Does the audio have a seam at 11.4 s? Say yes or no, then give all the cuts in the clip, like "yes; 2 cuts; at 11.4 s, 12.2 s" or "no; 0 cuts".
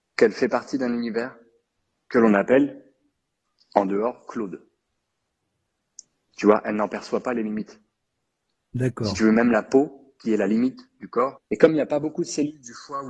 yes; 1 cut; at 11.4 s